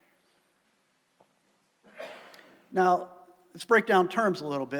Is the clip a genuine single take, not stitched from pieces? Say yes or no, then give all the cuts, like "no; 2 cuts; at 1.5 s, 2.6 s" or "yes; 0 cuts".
yes; 0 cuts